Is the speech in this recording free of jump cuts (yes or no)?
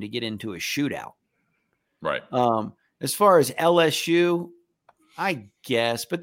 yes